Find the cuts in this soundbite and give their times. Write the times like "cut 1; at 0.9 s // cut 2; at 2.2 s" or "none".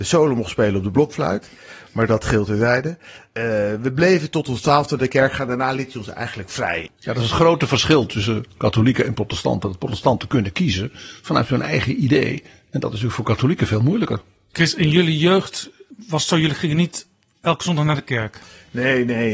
cut 1; at 6.9 s